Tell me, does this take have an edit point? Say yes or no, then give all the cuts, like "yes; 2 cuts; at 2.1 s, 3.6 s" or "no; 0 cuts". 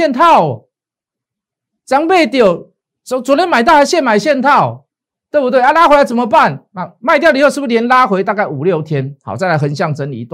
yes; 1 cut; at 6.7 s